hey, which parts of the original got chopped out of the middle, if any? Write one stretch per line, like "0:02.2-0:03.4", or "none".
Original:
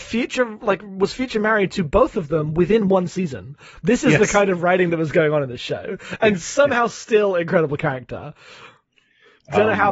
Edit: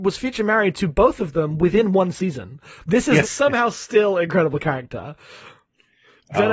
0:04.2-0:06.4